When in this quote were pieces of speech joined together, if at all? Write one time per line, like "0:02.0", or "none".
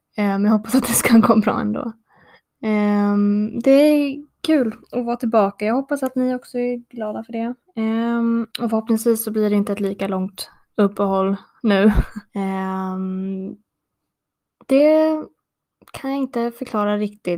0:08.5
0:12.3